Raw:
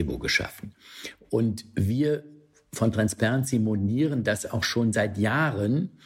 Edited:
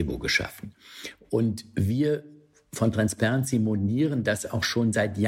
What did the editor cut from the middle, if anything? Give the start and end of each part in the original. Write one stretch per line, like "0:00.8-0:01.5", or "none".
none